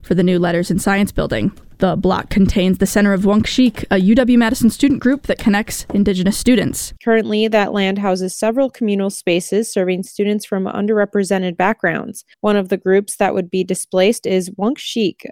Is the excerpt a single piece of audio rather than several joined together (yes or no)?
no